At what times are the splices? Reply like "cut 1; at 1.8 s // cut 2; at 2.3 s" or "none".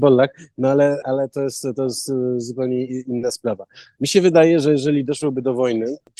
cut 1; at 1.0 s